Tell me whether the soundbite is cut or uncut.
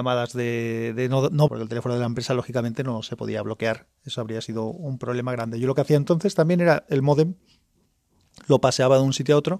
cut